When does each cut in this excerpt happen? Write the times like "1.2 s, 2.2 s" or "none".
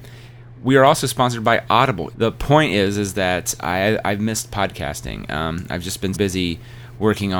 2.1 s, 6.1 s